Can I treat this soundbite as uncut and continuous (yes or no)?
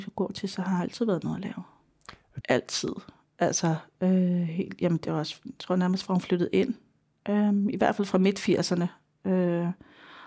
no